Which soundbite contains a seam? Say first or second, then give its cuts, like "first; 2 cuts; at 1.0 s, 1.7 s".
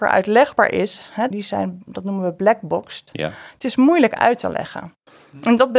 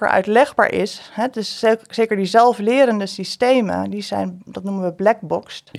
first; 1 cut; at 1.3 s